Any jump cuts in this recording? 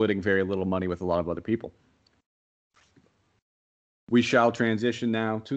no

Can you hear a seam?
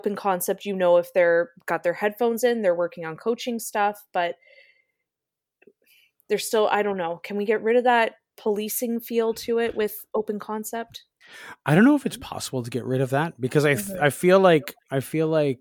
no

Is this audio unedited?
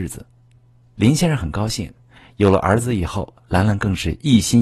no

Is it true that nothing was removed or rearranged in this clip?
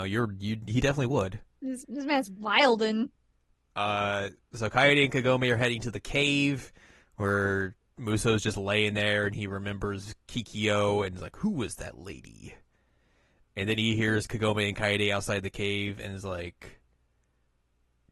yes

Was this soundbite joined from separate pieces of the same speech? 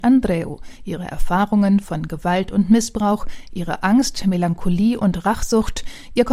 no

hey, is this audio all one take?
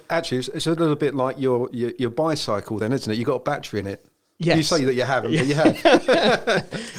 yes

